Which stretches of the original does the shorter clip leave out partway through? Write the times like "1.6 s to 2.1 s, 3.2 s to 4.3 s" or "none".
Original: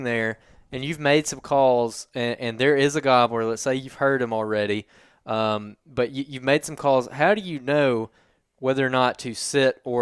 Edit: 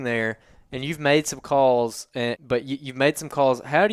2.4 s to 5.8 s